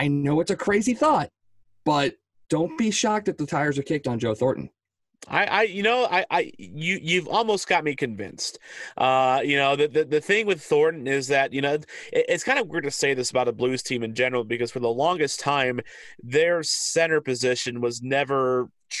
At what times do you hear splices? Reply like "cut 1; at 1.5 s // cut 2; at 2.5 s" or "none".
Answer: none